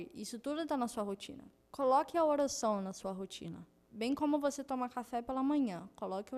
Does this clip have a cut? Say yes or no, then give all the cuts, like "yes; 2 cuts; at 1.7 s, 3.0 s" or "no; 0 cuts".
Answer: no; 0 cuts